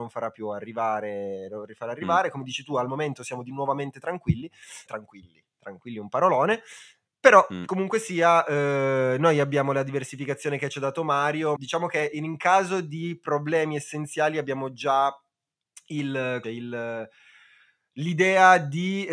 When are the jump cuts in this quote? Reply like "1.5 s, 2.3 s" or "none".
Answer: 4.9 s, 11.6 s, 16.4 s